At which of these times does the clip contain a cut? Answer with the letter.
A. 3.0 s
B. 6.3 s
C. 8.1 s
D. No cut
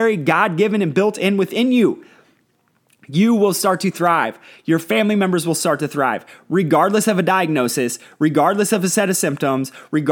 D